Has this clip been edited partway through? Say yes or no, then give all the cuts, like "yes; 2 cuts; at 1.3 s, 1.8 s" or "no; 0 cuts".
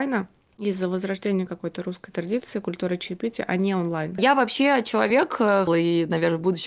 yes; 2 cuts; at 4.2 s, 5.7 s